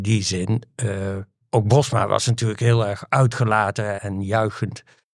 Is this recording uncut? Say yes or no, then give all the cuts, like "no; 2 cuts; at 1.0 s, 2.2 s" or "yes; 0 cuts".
no; 2 cuts; at 1.4 s, 4.0 s